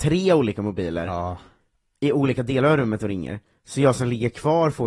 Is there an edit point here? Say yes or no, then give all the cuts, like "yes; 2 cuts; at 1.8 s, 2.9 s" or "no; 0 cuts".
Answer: no; 0 cuts